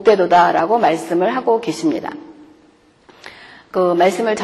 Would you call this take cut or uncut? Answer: uncut